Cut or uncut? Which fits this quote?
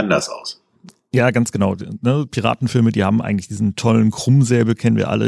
uncut